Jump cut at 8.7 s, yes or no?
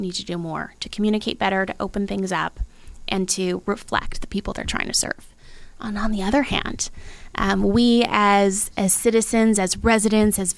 yes